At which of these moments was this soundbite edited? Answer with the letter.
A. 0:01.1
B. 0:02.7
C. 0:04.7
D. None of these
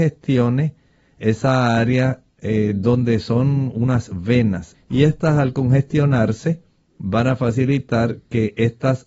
C